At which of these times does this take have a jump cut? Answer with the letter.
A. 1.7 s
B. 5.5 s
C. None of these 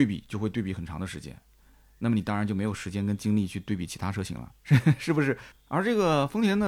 B